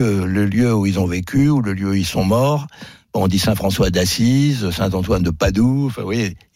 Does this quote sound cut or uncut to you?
uncut